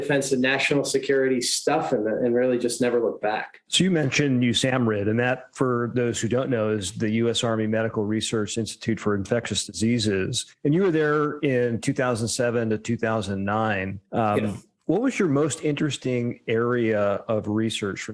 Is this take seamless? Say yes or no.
yes